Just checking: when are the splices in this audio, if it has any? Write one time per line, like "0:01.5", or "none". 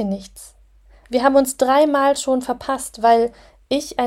none